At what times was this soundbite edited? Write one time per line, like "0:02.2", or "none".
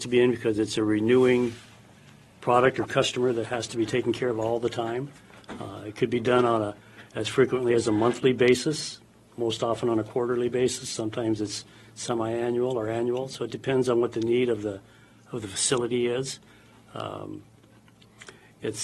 none